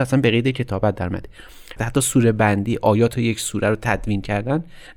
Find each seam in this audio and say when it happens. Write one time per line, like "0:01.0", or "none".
0:01.8

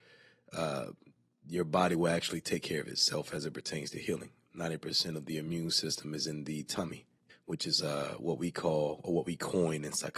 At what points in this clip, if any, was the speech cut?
0:07.3

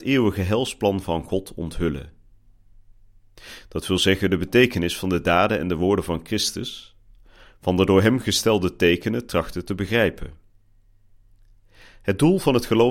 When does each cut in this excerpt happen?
none

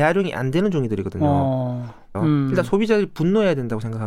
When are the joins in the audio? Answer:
0:02.1

